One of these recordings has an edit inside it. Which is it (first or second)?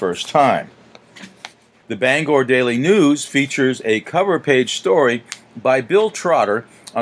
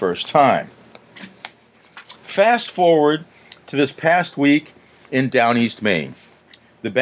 first